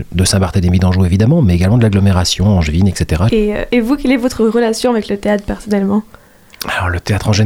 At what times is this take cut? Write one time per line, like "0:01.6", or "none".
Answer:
0:03.3